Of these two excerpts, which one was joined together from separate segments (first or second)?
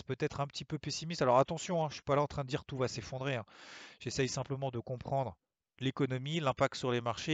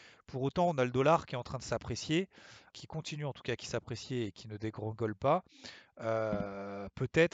second